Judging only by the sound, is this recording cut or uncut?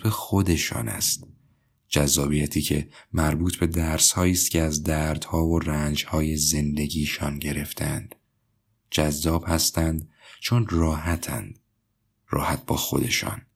uncut